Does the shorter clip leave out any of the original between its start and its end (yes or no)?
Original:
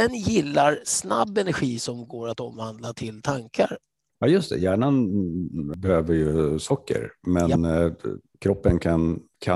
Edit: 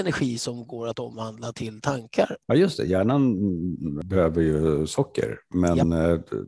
yes